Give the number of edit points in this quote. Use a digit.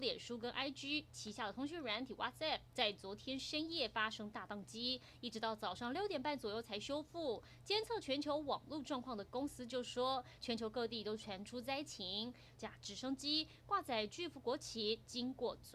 2